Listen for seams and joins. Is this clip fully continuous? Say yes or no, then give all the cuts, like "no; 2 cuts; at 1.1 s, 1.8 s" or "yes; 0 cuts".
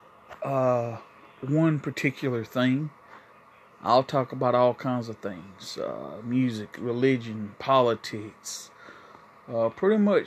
no; 1 cut; at 6.8 s